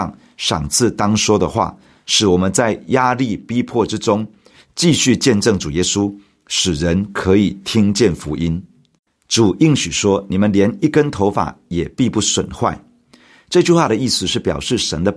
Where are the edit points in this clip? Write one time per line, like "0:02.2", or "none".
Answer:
0:09.1